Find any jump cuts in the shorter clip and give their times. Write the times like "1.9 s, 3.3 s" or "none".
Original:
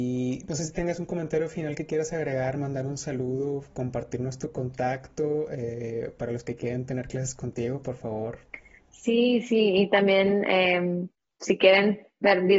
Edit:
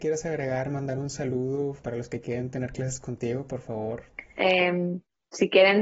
1.8 s, 4.4 s

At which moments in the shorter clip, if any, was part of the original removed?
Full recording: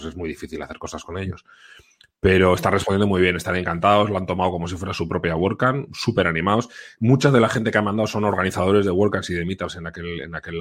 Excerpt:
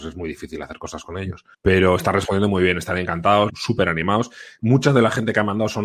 1.5 s, 3.5 s

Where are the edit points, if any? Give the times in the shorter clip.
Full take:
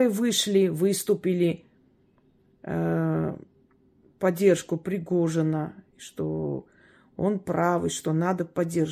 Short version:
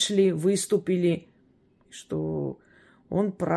1.8 s

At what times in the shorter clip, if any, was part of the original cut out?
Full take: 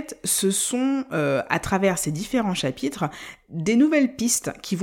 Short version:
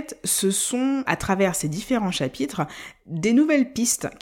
1.0 s

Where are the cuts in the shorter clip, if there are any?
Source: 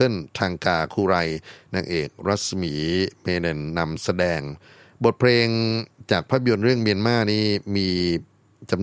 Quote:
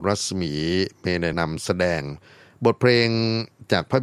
1.3 s

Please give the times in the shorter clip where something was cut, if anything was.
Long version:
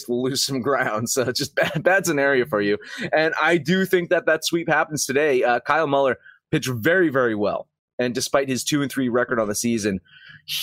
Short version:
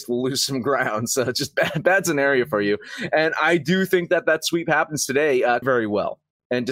5.6 s

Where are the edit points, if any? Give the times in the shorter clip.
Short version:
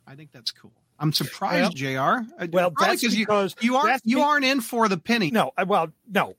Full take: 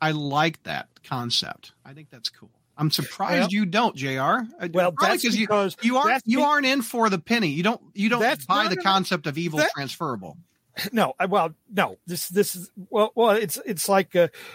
1.7 s, 5.3 s

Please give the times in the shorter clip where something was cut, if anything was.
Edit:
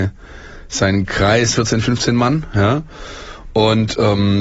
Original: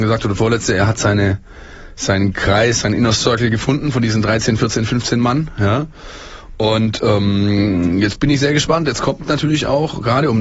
1.5 s

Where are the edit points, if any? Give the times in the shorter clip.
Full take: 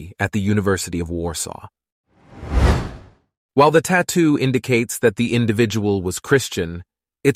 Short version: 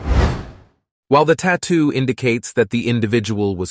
none

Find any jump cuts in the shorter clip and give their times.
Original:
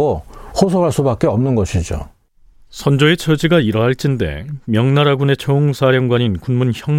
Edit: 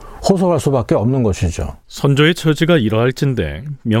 1.8 s

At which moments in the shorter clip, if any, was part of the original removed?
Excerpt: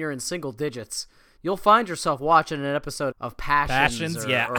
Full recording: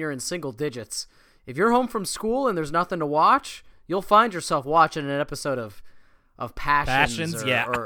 1.4 s, 3.1 s

